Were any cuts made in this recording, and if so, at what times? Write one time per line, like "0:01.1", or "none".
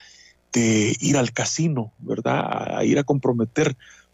none